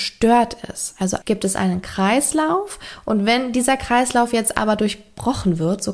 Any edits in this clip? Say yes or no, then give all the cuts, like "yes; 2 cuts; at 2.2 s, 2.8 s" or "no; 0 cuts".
yes; 1 cut; at 1.2 s